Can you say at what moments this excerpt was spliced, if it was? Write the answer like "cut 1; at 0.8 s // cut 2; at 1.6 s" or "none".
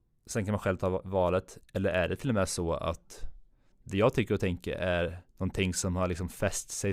cut 1; at 1.6 s // cut 2; at 5.3 s